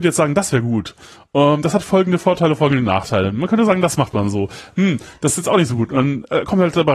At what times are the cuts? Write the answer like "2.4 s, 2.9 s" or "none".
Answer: none

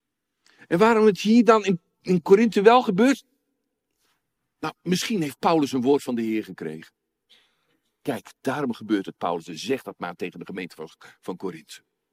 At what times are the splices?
none

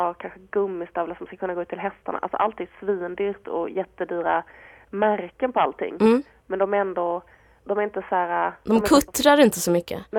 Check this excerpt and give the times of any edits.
7.6 s

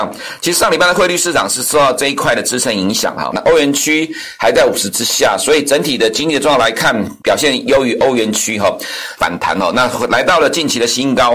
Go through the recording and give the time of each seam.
3.3 s, 7.2 s, 9.2 s

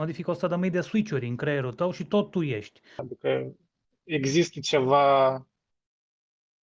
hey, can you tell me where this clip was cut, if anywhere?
3.0 s

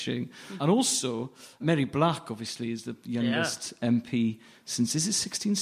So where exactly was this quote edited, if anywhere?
none

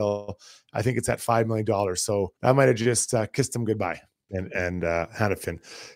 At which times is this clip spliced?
2.4 s, 4.3 s

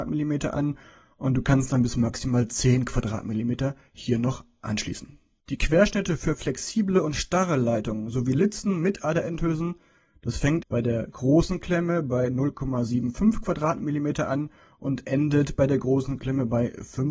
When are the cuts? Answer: 5.4 s, 10.6 s

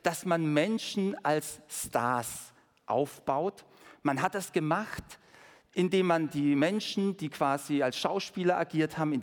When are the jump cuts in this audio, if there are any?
none

